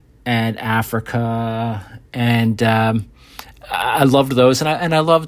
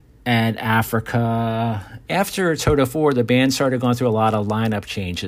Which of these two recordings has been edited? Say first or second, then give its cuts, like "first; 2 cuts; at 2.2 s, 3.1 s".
second; 1 cut; at 2.1 s